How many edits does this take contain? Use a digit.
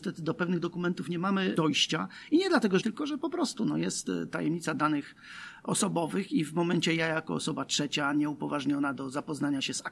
1